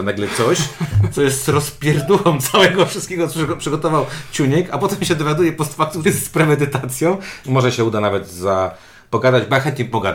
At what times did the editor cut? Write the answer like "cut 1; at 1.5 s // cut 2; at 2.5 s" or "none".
cut 1; at 6.0 s // cut 2; at 7.4 s